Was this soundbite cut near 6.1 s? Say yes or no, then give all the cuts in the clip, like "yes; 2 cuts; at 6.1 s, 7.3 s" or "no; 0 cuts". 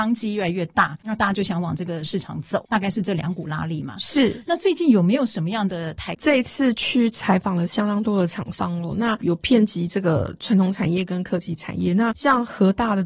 yes; 1 cut; at 6.1 s